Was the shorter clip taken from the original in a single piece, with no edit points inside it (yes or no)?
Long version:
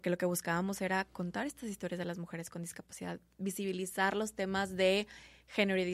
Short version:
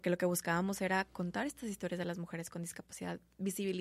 yes